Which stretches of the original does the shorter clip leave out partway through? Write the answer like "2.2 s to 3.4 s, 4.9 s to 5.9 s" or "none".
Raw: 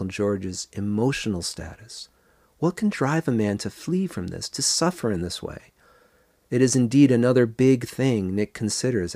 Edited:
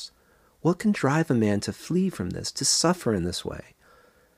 none